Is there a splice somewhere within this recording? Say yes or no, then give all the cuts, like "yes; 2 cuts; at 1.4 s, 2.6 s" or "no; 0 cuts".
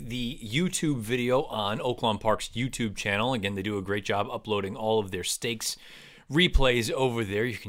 no; 0 cuts